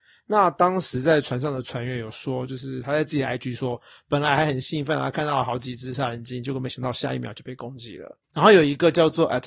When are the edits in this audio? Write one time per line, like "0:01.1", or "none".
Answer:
0:08.2

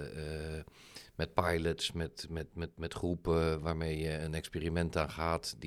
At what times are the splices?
none

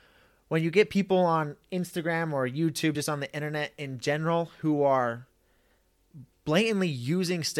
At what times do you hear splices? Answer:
none

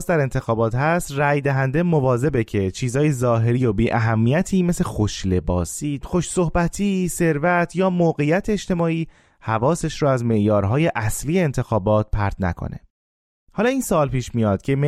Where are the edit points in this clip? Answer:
0:06.0

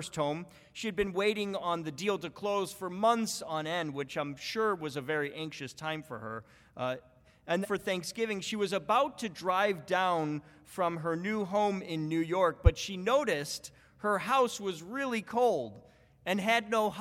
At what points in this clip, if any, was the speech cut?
0:07.6

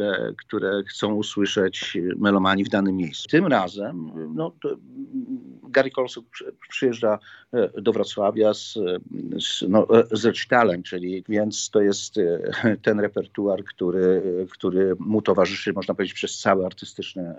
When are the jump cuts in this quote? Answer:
0:03.3
0:11.2

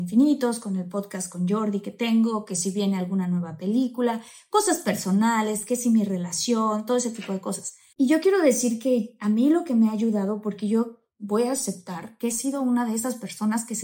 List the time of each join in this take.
0:07.9

